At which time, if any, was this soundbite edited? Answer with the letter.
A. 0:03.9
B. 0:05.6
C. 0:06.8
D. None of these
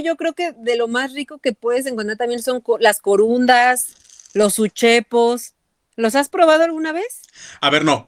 D